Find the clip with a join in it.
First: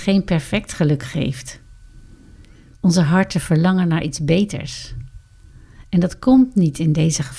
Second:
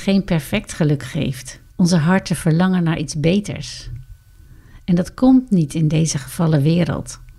second; 1 cut; at 1.7 s

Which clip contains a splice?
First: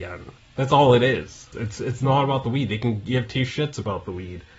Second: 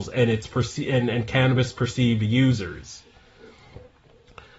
first; 1 cut; at 1.5 s

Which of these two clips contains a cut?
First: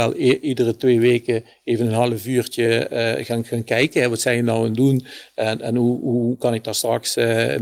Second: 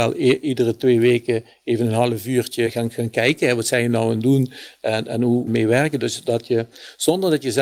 second; 2 cuts; at 2.7 s, 5.5 s

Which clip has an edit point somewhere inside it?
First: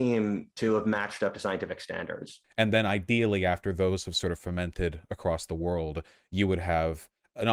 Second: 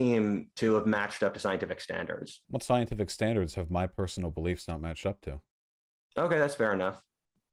first; 1 cut; at 2.4 s

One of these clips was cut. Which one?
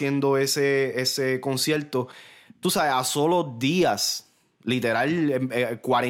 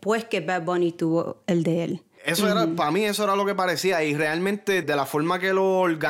second; 2 cuts; at 2.2 s, 4.8 s

